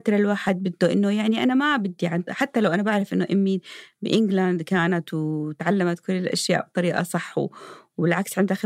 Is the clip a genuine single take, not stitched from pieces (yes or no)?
yes